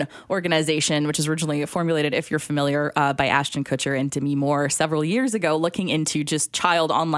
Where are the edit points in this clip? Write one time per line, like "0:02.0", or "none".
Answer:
none